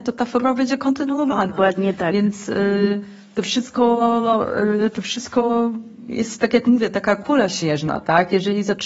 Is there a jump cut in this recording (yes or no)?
no